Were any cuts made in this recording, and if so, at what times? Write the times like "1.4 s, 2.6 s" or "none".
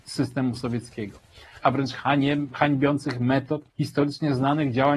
1.6 s, 3.7 s